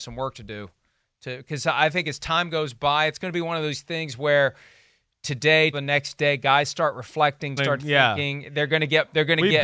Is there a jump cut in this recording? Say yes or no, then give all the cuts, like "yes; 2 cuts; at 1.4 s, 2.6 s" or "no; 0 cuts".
yes; 2 cuts; at 5.7 s, 7.6 s